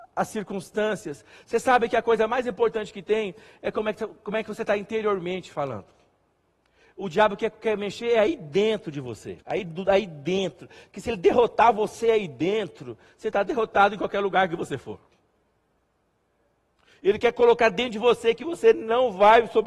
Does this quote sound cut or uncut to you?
cut